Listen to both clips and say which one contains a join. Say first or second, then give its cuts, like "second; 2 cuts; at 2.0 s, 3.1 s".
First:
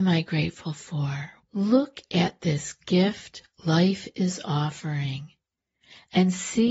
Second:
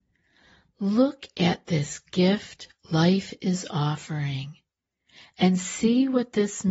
first; 1 cut; at 1.4 s